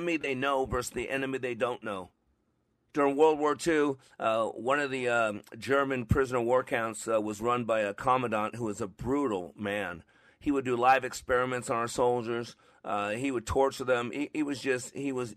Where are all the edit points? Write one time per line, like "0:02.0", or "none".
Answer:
none